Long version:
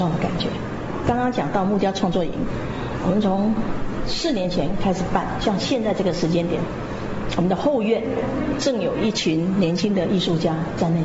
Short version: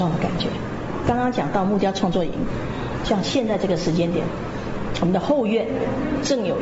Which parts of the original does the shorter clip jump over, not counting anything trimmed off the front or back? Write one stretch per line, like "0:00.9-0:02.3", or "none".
0:03.0-0:05.4